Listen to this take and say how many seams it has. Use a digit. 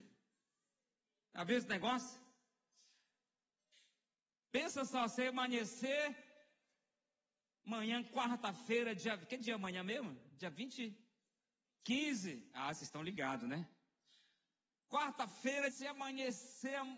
2